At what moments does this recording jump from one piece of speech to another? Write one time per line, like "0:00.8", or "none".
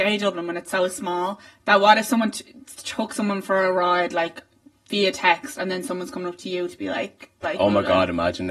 0:07.4